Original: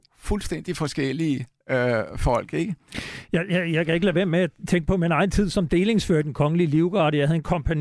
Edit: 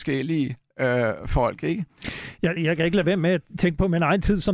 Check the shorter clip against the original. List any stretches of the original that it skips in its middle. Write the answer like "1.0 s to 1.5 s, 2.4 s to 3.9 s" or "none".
3.5 s to 3.7 s